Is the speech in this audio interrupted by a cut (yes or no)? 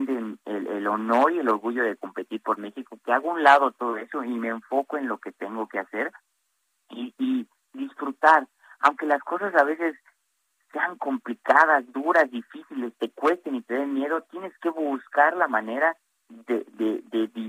no